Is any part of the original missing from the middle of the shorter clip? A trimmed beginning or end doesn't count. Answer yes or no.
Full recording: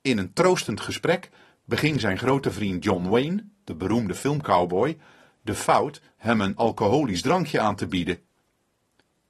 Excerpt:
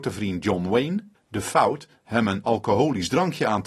yes